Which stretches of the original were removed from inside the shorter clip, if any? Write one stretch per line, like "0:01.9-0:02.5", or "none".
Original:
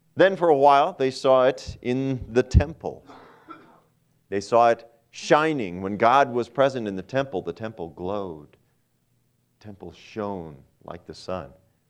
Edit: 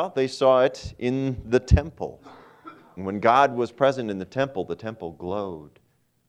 0:03.8-0:05.7